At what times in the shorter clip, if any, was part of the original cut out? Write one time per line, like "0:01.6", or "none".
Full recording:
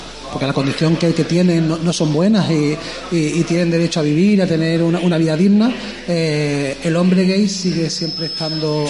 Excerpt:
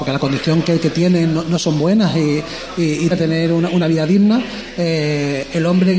0:03.1

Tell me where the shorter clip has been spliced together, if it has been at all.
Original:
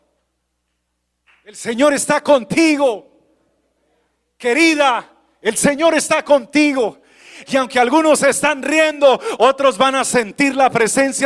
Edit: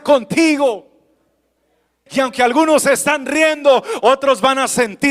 0:02.1

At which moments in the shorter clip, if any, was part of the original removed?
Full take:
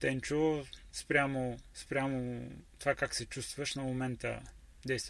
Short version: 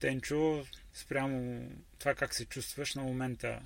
0:00.9

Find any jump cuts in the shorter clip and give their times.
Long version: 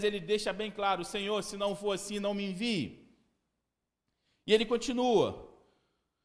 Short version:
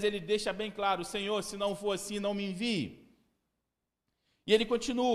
none

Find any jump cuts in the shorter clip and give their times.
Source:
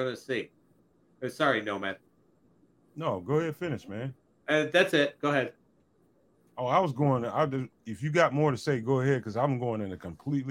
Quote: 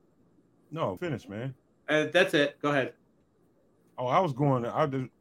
0:01.0

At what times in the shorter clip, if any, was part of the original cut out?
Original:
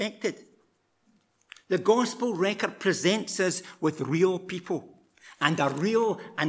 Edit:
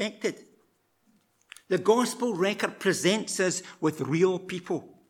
none

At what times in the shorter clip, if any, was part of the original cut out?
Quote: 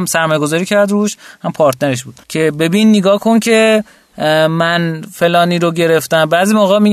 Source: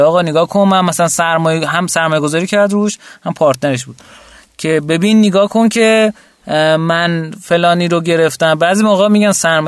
0:02.2

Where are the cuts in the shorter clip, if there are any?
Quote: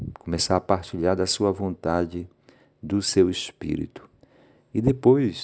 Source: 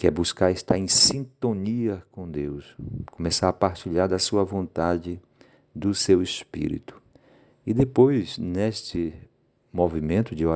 none

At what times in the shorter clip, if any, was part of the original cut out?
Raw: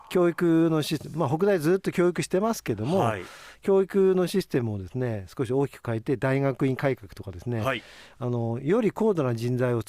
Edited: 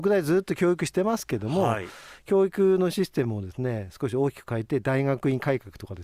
none

